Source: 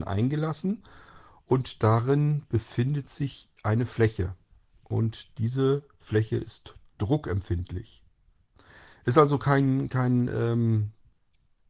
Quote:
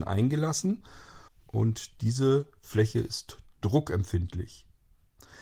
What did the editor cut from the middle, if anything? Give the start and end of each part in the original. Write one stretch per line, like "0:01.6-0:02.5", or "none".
0:01.3-0:04.6